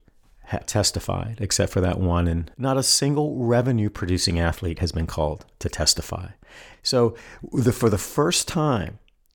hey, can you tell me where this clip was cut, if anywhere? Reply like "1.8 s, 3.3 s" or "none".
2.5 s